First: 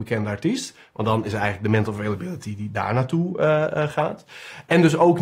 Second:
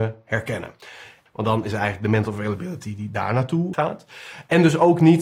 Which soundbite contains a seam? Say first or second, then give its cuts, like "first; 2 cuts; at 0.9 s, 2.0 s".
second; 2 cuts; at 1.3 s, 3.7 s